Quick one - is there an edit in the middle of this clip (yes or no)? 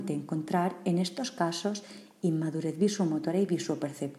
no